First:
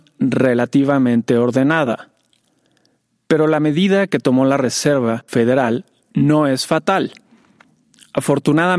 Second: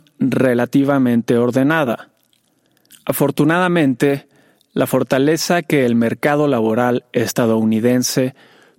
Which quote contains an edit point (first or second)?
second